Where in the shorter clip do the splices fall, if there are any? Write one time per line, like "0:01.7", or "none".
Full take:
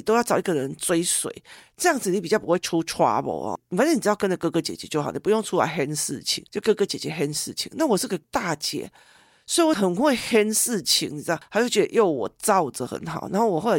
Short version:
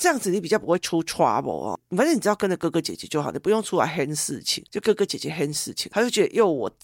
0:05.9